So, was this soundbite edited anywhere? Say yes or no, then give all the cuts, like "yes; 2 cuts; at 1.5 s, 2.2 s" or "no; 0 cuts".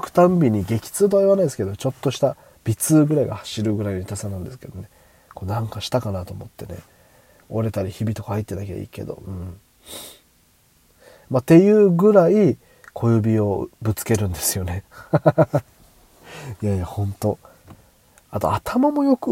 no; 0 cuts